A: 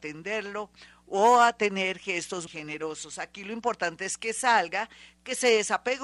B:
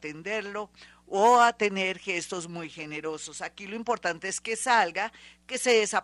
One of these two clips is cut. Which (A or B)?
A